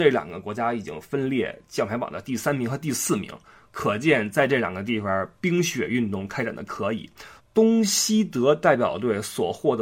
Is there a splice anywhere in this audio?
yes; 1 cut; at 7.4 s

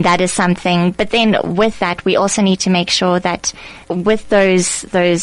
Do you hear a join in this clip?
yes; 1 cut; at 3.8 s

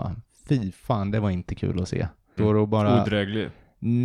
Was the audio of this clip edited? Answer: yes; 1 cut; at 2.4 s

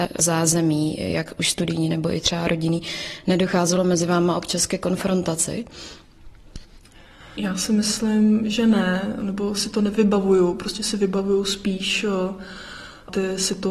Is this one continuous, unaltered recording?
yes; 0 cuts

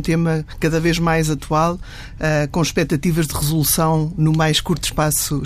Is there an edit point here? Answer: no; 0 cuts

